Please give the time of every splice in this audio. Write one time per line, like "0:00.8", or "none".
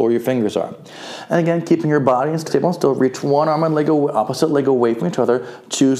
0:02.5